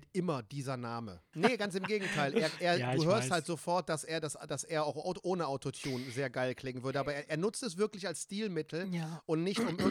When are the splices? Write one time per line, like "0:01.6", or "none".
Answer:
0:01.3